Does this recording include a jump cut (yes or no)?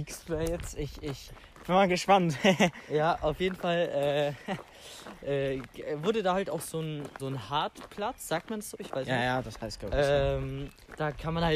yes